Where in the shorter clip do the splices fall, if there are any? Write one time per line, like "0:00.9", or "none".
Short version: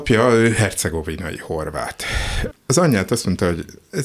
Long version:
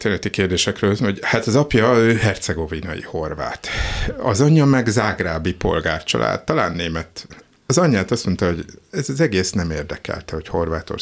0:02.5